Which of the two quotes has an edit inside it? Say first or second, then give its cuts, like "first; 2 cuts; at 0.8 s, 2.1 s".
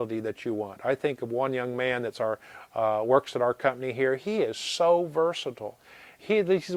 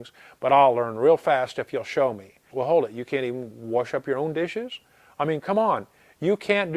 second; 1 cut; at 2.5 s